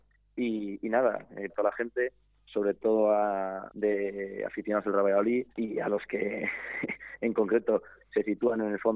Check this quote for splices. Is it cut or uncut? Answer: cut